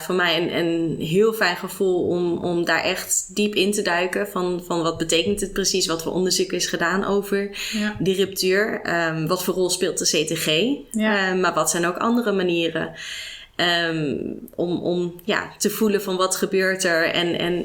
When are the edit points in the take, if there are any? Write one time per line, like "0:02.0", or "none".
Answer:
none